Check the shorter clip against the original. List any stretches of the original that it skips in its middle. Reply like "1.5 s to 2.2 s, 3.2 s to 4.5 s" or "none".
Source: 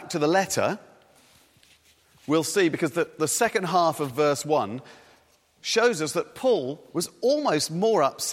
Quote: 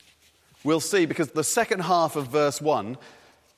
2.9 s to 3.1 s